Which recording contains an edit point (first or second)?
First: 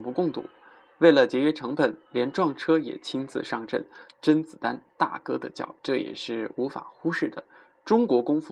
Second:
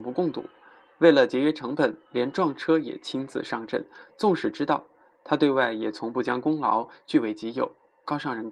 first